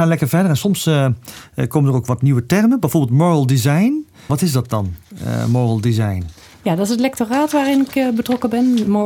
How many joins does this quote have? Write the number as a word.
one